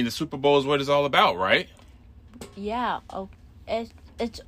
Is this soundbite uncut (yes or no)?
yes